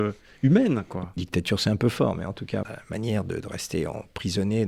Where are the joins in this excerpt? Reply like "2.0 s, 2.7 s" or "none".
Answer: 1.2 s, 2.6 s